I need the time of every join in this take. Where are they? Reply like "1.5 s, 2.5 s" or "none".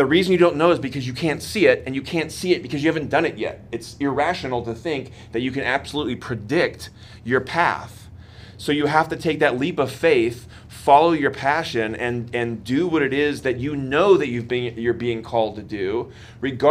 none